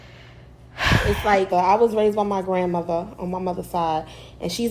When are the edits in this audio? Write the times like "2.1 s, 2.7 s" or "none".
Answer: 1.5 s